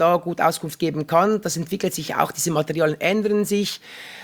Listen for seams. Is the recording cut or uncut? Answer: uncut